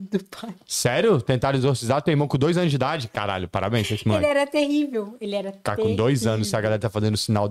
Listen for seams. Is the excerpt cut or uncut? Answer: uncut